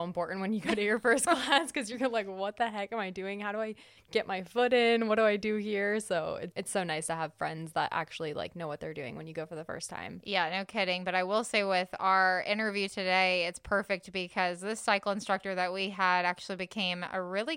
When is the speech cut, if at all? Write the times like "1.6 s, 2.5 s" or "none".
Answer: none